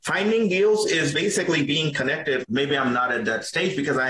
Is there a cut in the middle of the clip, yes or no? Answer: yes